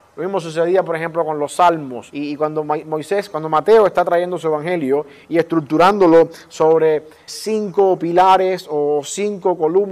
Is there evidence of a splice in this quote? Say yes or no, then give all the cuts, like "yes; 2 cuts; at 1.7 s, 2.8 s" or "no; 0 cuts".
yes; 2 cuts; at 2.1 s, 7.3 s